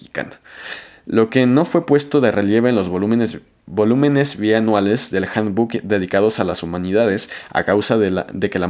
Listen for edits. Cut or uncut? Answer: uncut